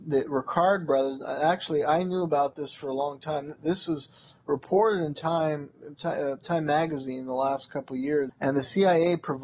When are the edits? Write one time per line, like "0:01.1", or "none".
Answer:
0:08.3